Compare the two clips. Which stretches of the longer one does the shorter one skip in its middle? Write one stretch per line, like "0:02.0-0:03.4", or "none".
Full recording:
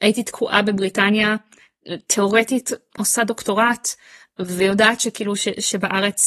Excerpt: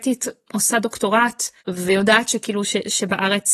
0:04.0-0:04.3